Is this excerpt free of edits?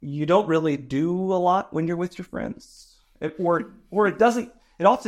yes; 0 cuts

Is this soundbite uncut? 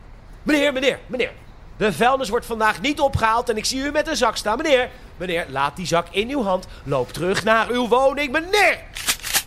yes; 0 cuts

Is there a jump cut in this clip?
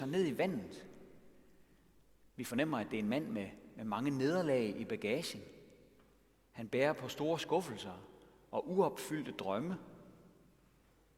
no; 0 cuts

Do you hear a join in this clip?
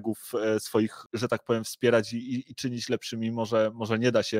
no; 0 cuts

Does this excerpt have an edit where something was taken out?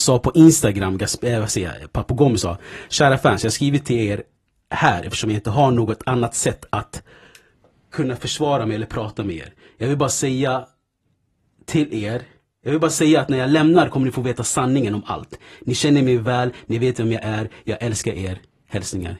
no; 0 cuts

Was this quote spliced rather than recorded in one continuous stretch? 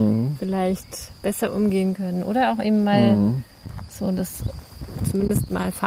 no; 0 cuts

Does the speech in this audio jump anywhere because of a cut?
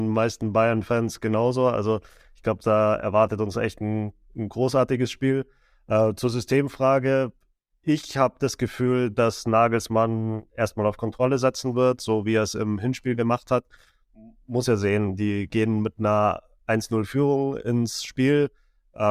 no; 0 cuts

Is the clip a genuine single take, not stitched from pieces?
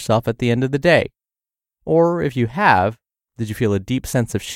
yes; 0 cuts

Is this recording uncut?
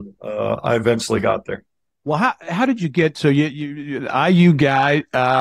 yes; 0 cuts

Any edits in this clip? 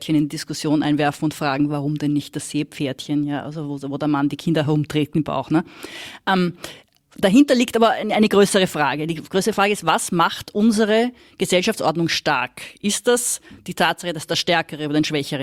no; 0 cuts

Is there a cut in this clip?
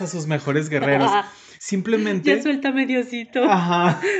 no; 0 cuts

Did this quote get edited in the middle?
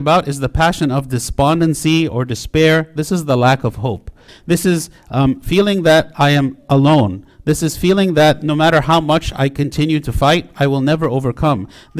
yes; 1 cut; at 4.3 s

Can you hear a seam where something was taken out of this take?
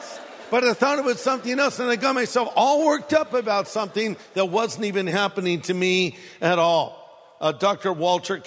no; 0 cuts

